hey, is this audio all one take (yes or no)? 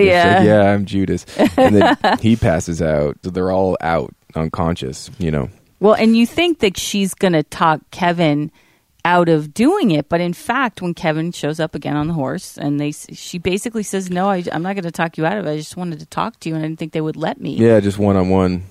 no